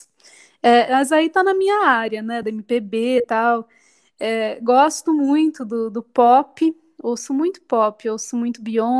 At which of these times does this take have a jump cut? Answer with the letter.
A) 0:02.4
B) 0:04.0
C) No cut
C